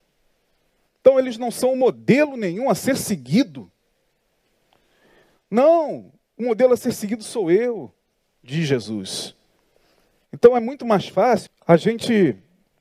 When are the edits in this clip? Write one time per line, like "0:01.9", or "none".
0:10.2
0:11.5